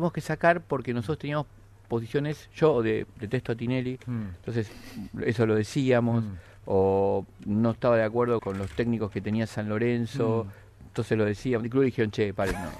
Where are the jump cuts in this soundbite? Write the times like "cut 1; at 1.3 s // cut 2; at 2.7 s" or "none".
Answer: cut 1; at 8.4 s // cut 2; at 11.6 s

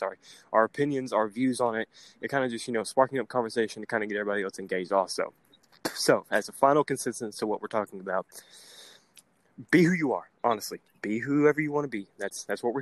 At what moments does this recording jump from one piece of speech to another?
none

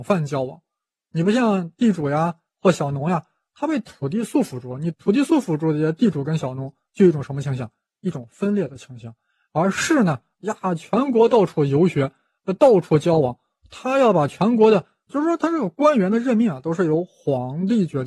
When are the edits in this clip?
cut 1; at 10.4 s // cut 2; at 15.1 s

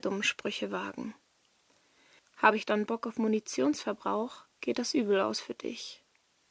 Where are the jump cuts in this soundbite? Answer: cut 1; at 2.2 s // cut 2; at 4.5 s

